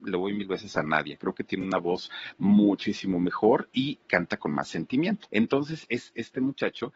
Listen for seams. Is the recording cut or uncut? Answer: cut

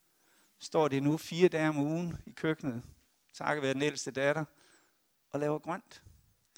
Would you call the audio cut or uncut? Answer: uncut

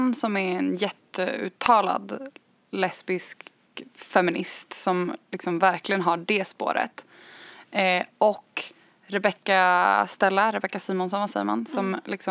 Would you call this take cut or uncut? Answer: uncut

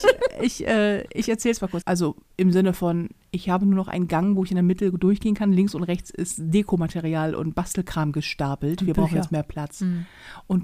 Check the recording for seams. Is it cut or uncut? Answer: cut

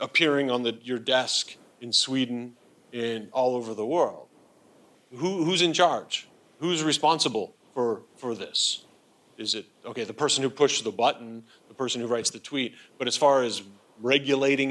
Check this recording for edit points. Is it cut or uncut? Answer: cut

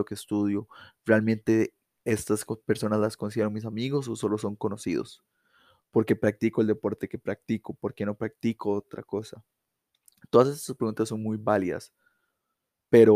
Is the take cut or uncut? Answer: uncut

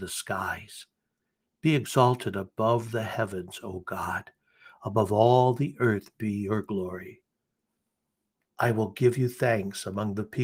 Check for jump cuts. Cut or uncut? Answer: uncut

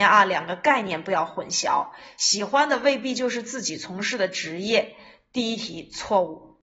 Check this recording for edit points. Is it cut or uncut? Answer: uncut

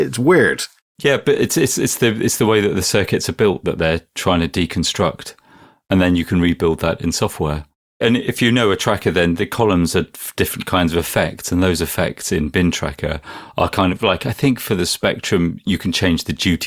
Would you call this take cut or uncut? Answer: uncut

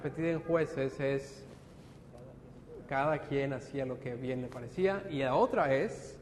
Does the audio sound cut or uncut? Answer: uncut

